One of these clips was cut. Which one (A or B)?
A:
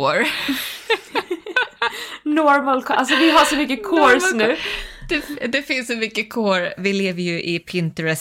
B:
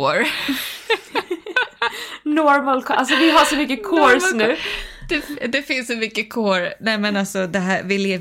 A